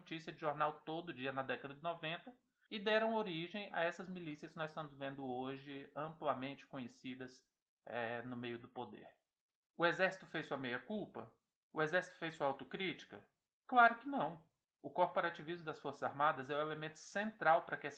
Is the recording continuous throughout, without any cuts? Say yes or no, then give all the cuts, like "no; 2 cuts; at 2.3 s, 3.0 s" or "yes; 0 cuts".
yes; 0 cuts